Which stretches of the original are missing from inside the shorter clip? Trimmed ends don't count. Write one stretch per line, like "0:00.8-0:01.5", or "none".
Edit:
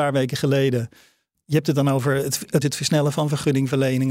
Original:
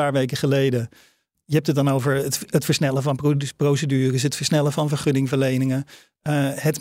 0:02.6-0:04.2